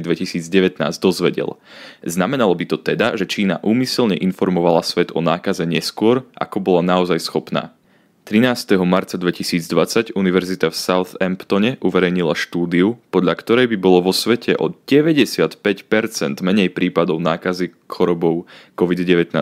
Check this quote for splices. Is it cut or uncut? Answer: uncut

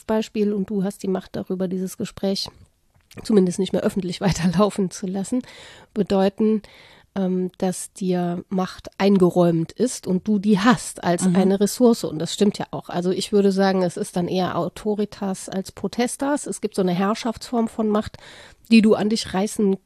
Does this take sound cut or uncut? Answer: uncut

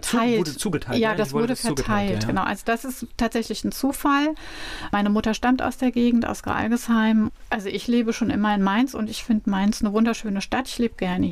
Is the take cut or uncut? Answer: cut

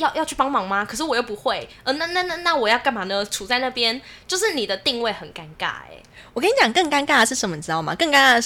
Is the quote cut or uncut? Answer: uncut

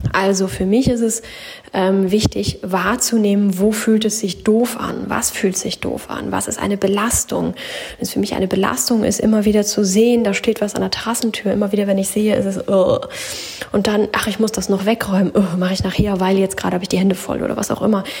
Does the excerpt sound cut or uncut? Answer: uncut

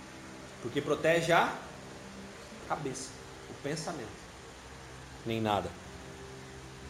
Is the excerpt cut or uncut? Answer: cut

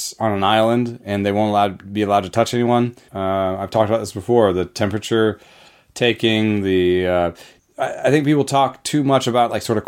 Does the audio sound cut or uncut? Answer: cut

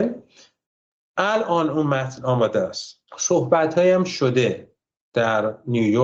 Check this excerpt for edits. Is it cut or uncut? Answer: cut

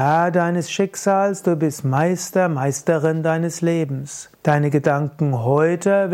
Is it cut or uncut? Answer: cut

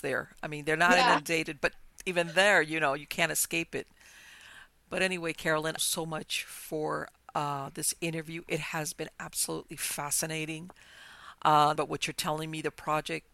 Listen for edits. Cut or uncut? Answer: cut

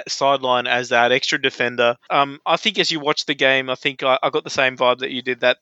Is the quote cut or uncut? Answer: cut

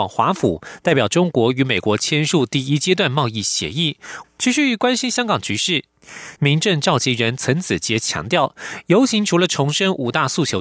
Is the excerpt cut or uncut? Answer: cut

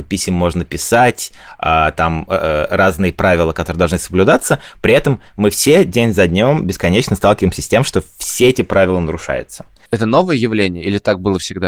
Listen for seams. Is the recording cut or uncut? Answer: cut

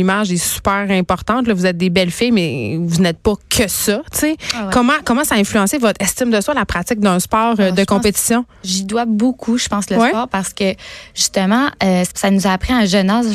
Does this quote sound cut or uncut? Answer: cut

